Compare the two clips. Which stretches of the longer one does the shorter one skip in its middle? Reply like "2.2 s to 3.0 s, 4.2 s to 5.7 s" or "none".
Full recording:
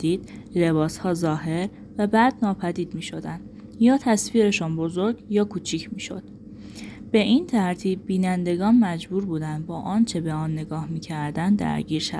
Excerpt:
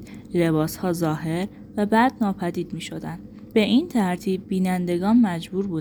3.7 s to 7.1 s

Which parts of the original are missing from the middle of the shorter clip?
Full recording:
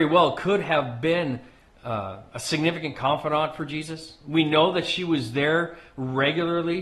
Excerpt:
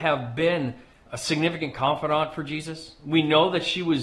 1.7 s to 2.3 s

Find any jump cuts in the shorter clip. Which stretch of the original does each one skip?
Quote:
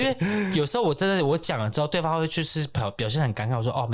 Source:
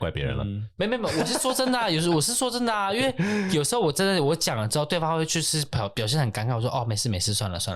none

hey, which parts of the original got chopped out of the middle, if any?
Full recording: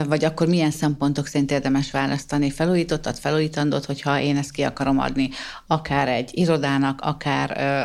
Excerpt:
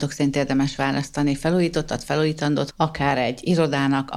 3.9 s to 5.6 s

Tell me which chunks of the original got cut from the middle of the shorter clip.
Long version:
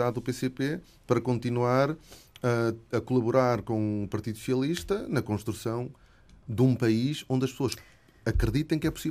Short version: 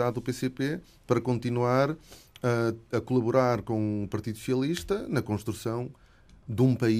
none

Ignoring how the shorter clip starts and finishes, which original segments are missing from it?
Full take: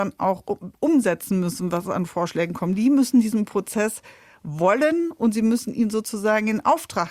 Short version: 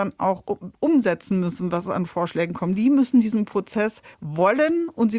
4.1 s to 4.4 s

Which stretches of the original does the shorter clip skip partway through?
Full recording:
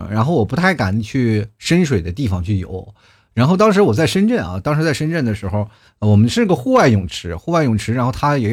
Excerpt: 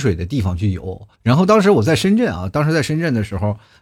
3.0 s to 3.3 s

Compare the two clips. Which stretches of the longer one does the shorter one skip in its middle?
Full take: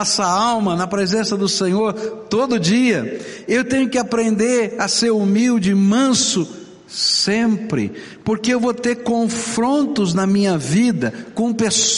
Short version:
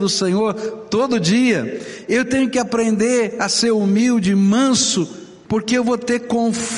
6.8 s to 8.2 s

